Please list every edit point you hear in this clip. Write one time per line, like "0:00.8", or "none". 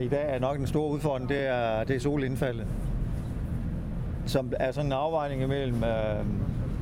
none